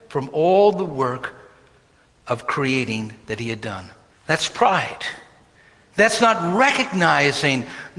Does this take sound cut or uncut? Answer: cut